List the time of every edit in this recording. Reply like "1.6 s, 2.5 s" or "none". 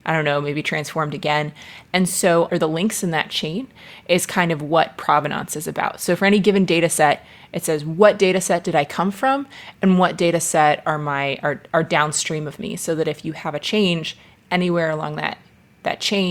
2.5 s